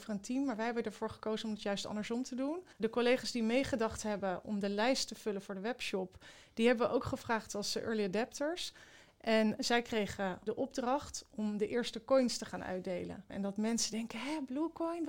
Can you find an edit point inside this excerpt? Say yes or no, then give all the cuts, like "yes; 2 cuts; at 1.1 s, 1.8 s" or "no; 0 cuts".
yes; 2 cuts; at 2.7 s, 13.3 s